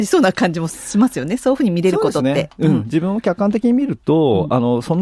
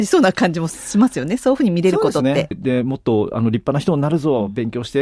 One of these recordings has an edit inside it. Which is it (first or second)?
second